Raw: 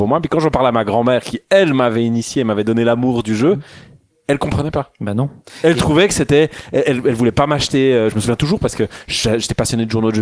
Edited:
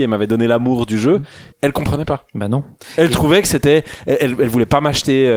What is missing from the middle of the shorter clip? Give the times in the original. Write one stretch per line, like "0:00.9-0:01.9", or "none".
0:03.9-0:04.2